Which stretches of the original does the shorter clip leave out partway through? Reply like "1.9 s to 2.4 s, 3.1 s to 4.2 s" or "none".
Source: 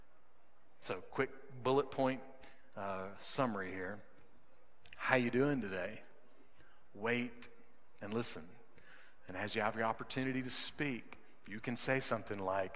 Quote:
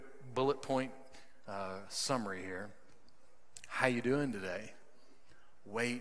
none